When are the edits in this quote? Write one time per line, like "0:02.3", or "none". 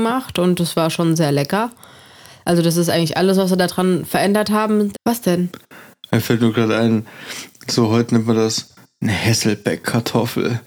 0:04.9